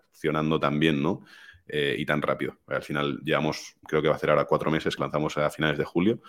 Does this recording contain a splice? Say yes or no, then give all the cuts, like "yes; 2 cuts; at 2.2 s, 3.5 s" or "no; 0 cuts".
yes; 2 cuts; at 3.8 s, 5.0 s